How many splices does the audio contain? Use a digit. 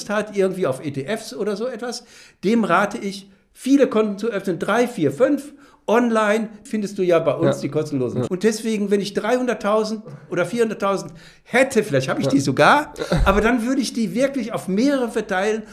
2